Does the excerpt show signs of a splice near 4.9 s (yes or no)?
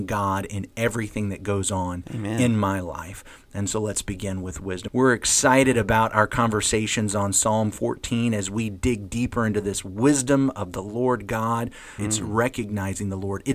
yes